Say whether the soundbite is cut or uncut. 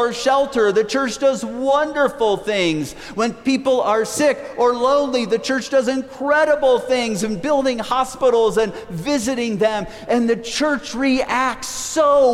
uncut